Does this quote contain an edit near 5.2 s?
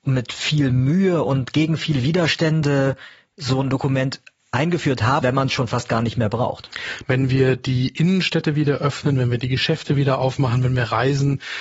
yes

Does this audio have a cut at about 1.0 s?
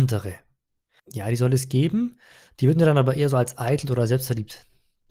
yes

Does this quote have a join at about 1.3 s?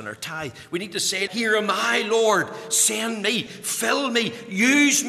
yes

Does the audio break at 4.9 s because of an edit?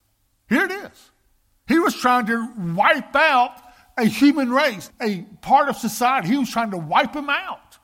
yes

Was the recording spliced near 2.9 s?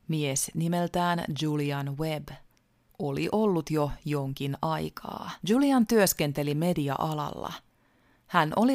yes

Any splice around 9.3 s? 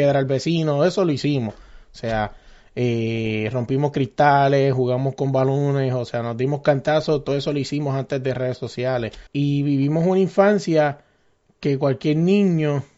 yes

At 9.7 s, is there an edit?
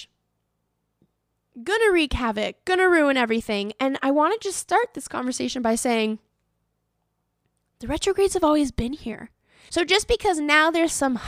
yes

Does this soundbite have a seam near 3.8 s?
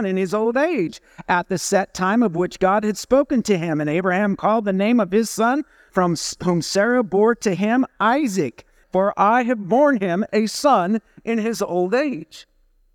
no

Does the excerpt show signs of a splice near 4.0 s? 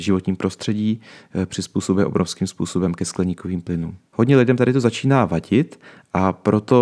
yes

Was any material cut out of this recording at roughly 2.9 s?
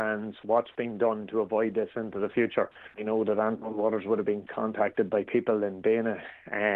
yes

